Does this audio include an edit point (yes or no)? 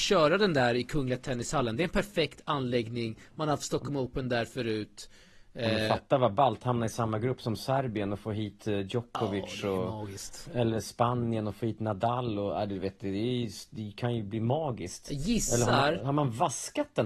no